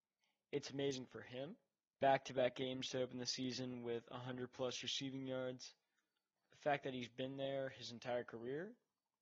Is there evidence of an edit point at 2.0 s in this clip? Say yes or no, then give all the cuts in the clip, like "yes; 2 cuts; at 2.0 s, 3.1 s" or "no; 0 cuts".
yes; 2 cuts; at 2.0 s, 6.4 s